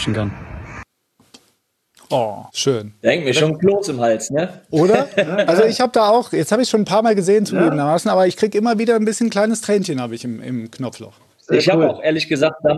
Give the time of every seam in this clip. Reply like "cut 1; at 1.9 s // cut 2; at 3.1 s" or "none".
cut 1; at 2.5 s